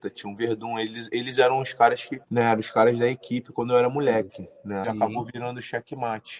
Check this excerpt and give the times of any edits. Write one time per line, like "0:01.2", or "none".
0:02.2
0:04.8